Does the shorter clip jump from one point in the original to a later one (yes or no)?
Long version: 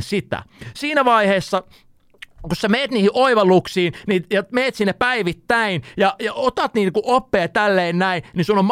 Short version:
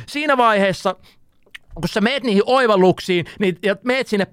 no